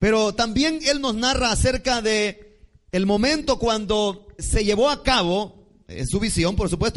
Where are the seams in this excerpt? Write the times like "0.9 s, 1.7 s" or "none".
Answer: 4.4 s